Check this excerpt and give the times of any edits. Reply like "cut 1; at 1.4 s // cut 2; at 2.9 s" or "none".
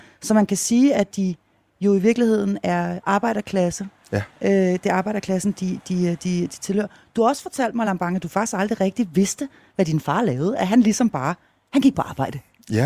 none